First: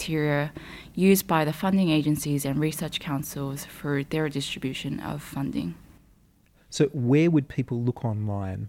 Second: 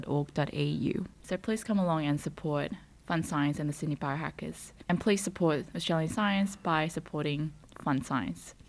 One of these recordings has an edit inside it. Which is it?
second; 2 cuts; at 1.2 s, 4.8 s

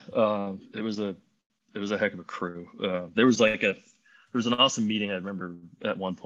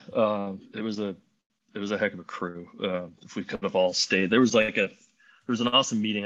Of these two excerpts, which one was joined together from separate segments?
first; 1 cut; at 3.1 s

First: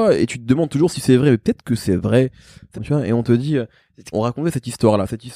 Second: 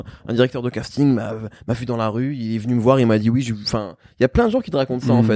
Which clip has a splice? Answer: first; 2 cuts; at 2.7 s, 4.1 s

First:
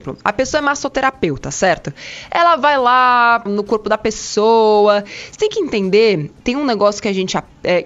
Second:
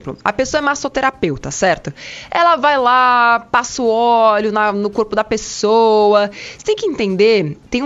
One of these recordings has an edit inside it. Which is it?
first; 1 cut; at 3.5 s

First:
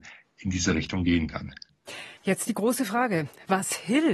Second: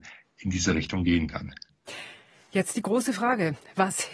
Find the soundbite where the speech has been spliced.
first; 1 cut; at 2.2 s

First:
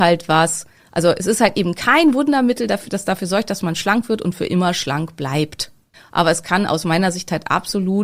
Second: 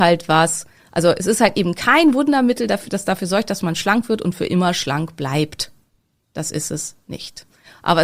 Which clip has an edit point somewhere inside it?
first; 1 cut; at 5.9 s

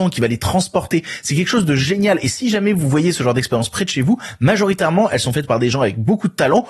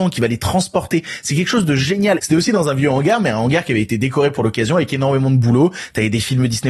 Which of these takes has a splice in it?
second; 1 cut; at 2.2 s

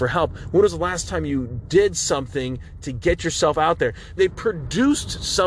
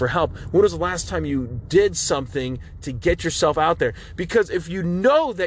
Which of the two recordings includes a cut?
first; 1 cut; at 4.2 s

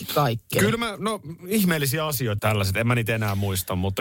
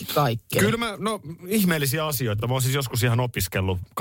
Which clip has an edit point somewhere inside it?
first; 1 cut; at 2.4 s

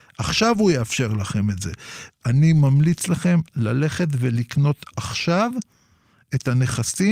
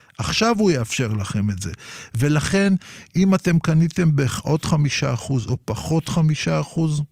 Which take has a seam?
first; 1 cut; at 2.1 s

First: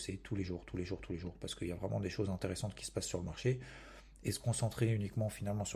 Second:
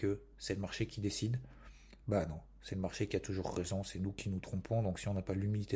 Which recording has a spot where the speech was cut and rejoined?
second; 1 cut; at 2.0 s

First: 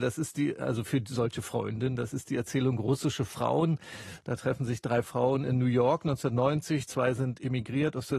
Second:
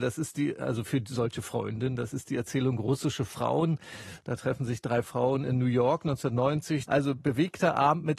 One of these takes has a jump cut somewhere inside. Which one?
second; 1 cut; at 6.9 s

